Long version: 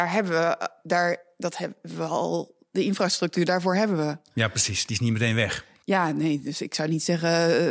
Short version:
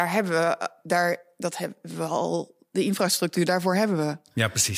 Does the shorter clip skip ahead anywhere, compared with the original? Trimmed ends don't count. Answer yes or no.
no